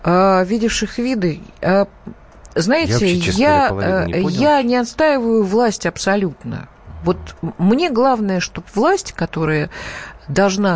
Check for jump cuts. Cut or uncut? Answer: uncut